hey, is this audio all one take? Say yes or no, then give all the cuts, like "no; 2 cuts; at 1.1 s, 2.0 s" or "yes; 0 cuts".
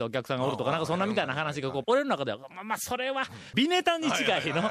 no; 2 cuts; at 1.8 s, 3.5 s